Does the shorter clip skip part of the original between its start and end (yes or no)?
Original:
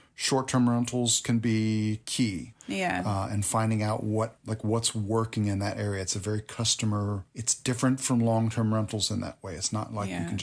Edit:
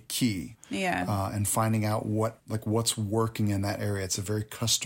no